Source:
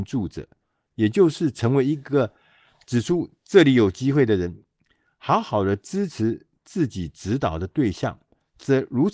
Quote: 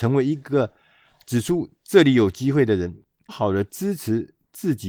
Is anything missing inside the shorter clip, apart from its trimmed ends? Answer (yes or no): yes